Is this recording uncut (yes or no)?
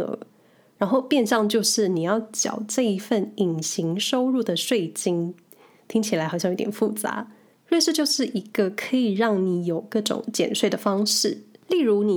no